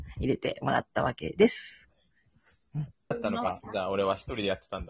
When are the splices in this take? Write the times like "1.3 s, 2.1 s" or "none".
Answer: 3.1 s